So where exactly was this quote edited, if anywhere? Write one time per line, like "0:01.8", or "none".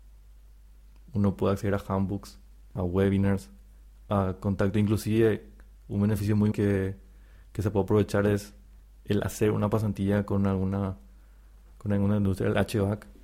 0:02.8
0:06.5